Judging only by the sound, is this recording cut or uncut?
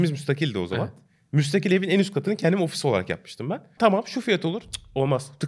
cut